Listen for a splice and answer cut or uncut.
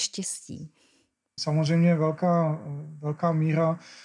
cut